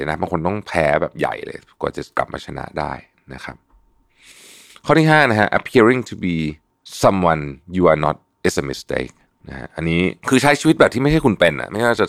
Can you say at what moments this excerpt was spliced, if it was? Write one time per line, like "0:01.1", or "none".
none